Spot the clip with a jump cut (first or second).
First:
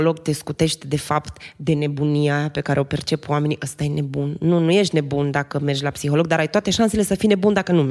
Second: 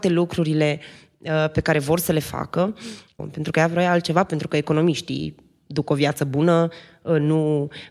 second